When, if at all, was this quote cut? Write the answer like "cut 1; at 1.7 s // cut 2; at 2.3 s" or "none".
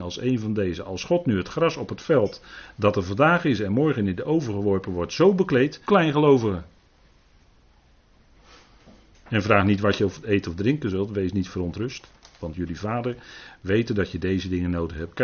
cut 1; at 5.8 s // cut 2; at 12.4 s